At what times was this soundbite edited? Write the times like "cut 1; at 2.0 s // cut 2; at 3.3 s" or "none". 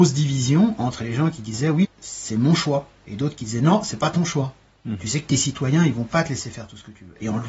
cut 1; at 1.8 s // cut 2; at 4.8 s